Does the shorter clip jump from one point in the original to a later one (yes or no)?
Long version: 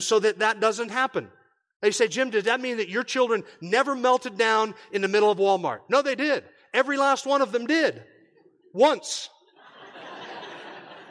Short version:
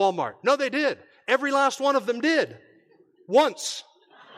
no